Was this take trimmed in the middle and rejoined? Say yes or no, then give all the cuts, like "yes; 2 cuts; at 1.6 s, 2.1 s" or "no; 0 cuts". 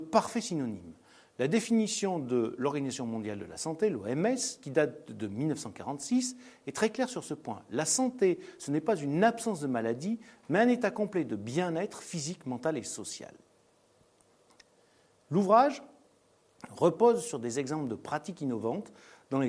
no; 0 cuts